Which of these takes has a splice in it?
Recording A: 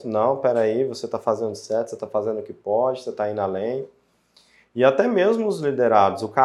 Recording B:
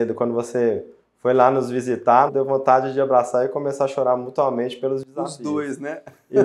B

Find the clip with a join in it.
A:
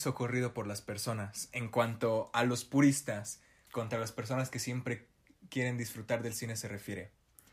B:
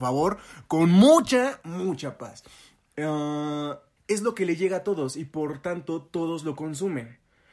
B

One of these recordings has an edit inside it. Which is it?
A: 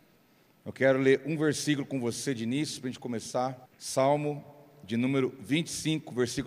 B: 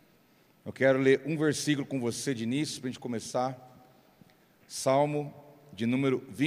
A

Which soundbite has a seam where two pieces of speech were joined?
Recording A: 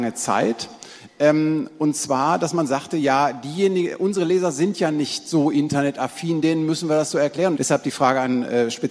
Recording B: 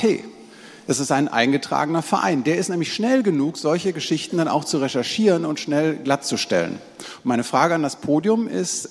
A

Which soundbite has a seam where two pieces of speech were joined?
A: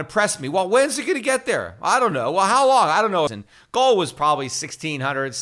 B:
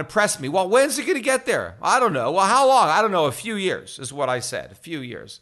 A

